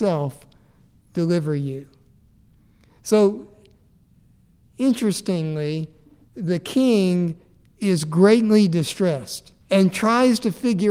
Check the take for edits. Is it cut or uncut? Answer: cut